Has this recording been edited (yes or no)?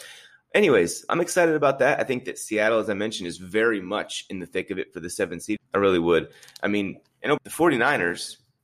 yes